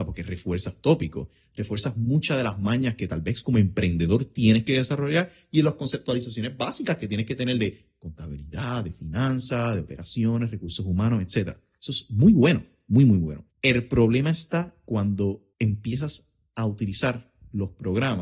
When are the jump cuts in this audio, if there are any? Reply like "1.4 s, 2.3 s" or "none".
13.5 s, 15.5 s